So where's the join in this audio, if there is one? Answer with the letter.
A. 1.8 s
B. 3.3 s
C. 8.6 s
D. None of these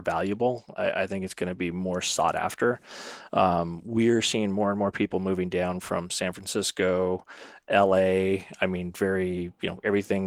D